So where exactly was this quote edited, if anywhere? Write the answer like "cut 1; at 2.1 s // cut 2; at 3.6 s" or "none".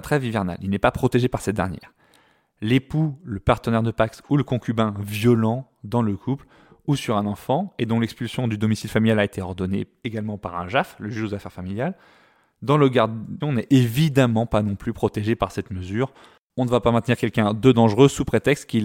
cut 1; at 13.4 s